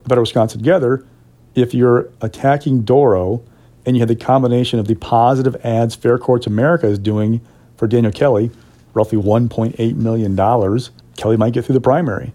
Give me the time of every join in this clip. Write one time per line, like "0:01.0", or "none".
0:11.0